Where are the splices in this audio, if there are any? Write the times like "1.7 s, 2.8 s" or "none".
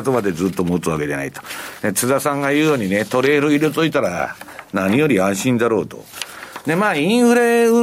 none